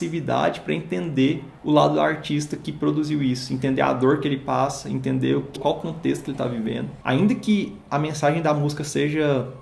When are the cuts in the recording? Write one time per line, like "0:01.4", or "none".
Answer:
0:05.6

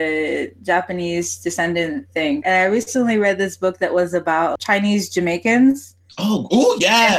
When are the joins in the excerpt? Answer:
0:02.4
0:04.6

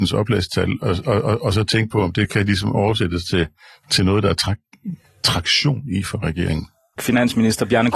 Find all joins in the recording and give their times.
0:07.0

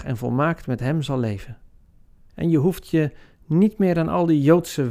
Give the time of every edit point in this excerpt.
0:02.3

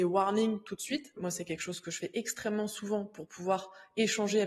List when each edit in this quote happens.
0:01.2

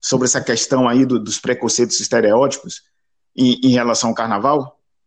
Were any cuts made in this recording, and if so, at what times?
none

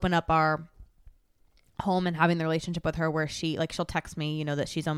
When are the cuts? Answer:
none

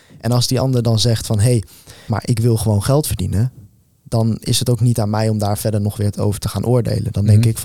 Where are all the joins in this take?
0:02.1

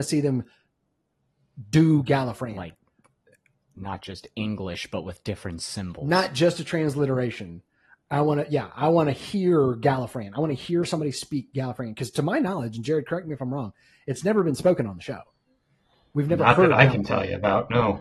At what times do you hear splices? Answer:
none

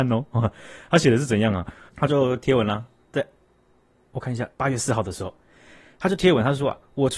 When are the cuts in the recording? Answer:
0:01.9
0:04.5

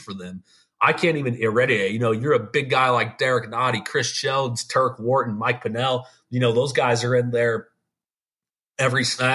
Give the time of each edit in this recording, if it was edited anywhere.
none

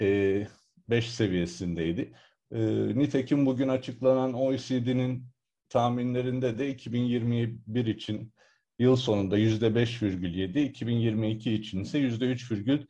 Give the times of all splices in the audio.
0:02.4

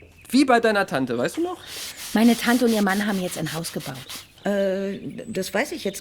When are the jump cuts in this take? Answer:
0:04.4

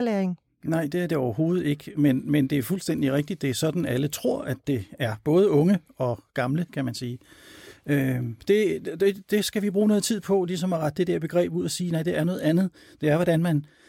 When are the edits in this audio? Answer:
none

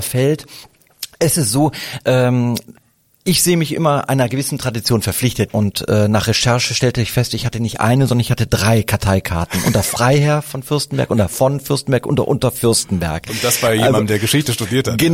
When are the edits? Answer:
0:05.5

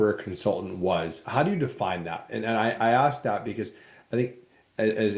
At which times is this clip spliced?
none

